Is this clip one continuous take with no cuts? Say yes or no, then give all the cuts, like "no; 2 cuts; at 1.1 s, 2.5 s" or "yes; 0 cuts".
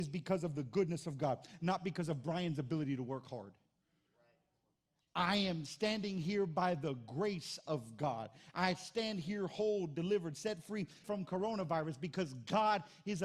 no; 1 cut; at 11.0 s